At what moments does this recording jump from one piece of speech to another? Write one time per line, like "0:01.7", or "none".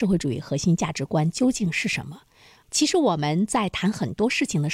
0:02.6